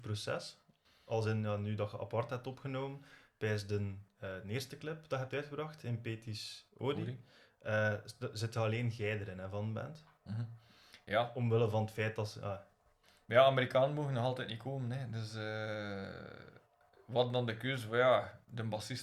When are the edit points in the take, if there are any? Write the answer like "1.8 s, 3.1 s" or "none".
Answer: none